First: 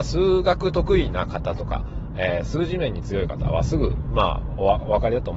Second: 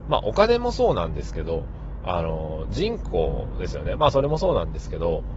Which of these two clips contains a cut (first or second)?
second